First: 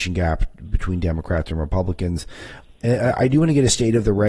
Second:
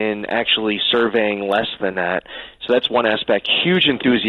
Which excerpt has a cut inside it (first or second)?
first